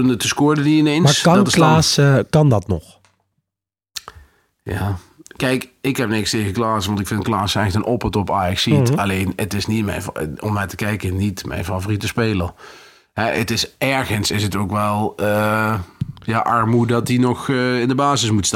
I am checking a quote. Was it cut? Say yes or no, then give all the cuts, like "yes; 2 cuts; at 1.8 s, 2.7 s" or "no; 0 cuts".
no; 0 cuts